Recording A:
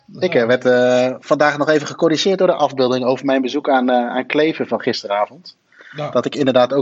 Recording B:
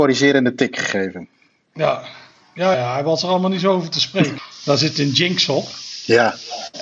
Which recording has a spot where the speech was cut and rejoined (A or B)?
B